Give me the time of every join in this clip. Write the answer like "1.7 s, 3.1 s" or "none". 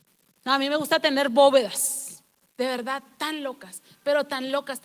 2.5 s